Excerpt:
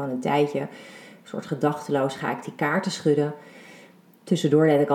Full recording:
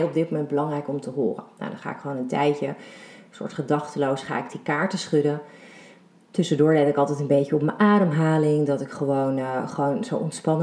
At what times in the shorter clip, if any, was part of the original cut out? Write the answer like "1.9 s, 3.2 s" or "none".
none